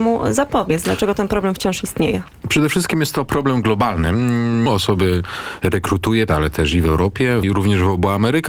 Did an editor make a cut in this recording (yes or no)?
yes